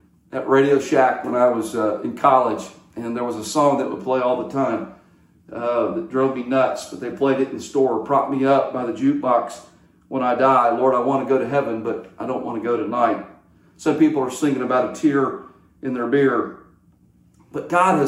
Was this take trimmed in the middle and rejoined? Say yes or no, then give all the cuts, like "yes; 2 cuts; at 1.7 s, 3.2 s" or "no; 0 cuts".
no; 0 cuts